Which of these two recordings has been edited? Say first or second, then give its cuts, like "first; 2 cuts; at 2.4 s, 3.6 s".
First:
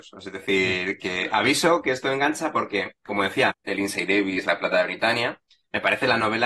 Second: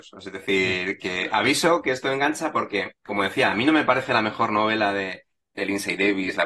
first; 1 cut; at 3.5 s